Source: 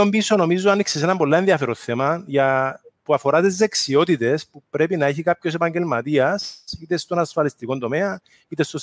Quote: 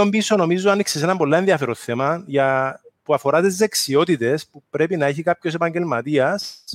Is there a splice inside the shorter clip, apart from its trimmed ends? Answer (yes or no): no